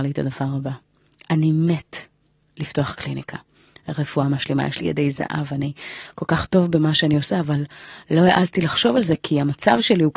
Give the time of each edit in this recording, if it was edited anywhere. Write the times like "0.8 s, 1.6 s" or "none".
none